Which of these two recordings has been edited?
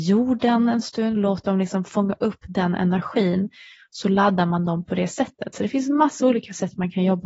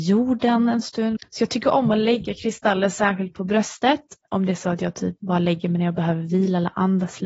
second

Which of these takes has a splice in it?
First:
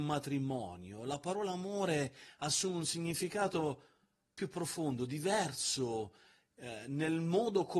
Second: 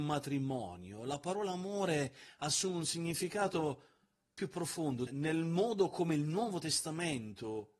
second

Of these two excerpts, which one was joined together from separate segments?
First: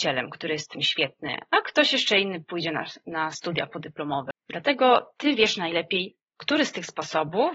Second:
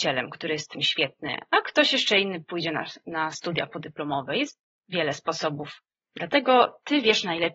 first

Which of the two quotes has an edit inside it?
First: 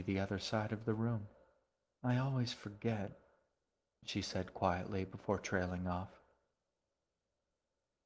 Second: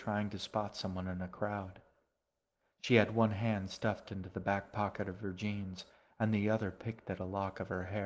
first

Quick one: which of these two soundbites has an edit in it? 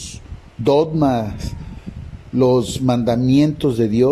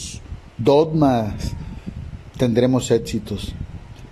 second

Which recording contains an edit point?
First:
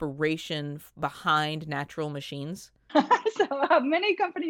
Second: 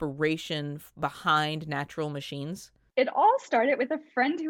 first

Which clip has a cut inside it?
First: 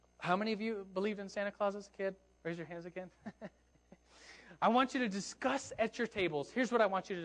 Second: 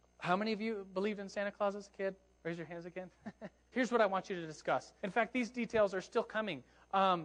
second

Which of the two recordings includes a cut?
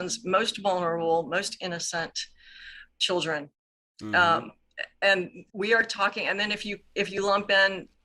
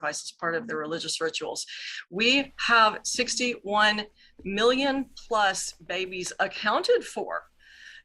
first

